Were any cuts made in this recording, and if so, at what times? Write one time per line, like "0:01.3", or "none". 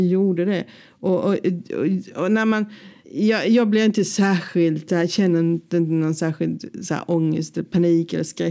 none